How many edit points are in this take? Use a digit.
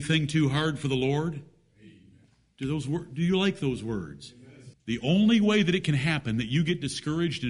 1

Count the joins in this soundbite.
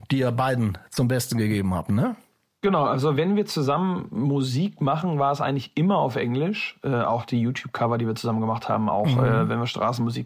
1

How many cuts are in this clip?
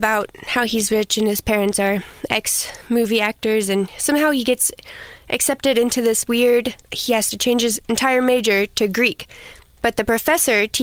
0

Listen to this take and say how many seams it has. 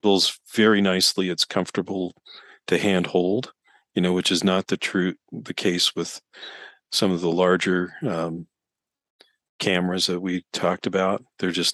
0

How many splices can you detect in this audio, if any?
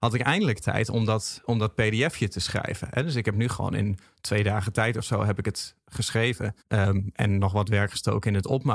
1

